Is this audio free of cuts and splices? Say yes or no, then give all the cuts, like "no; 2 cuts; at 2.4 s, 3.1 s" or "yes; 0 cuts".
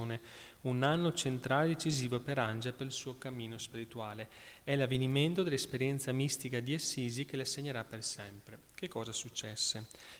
yes; 0 cuts